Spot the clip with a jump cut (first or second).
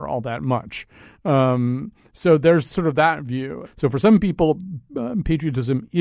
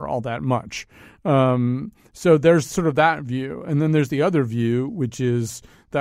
first